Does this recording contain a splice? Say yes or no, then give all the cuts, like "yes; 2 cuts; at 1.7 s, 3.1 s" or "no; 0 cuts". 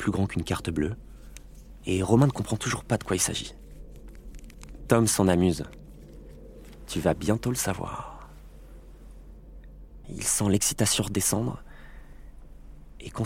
yes; 1 cut; at 10.0 s